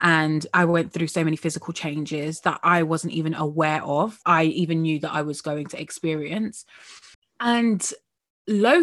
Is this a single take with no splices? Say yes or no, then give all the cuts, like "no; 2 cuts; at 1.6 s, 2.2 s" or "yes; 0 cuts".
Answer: yes; 0 cuts